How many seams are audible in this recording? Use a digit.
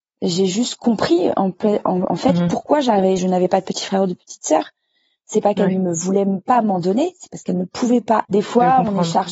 2